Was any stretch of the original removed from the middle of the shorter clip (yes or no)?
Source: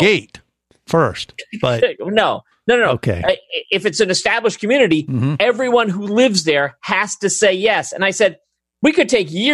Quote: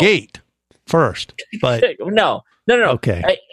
no